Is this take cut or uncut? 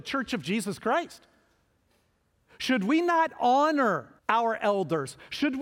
cut